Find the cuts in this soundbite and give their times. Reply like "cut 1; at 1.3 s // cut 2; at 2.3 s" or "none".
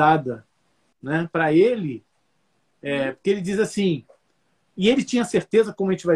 cut 1; at 0.9 s